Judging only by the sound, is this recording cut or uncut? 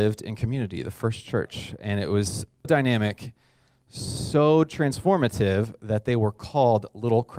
cut